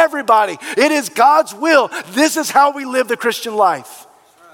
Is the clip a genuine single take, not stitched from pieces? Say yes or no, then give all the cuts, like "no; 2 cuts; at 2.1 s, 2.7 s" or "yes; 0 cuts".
yes; 0 cuts